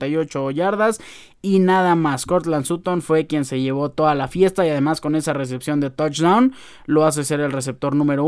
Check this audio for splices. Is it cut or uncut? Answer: uncut